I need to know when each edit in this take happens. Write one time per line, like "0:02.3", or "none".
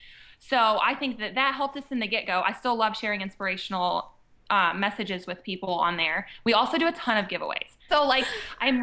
0:07.9